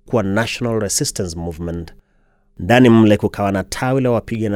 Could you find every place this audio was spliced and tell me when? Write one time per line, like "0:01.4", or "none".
none